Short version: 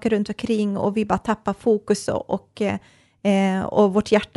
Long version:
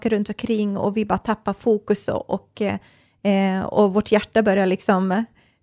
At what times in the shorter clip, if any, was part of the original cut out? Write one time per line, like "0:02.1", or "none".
none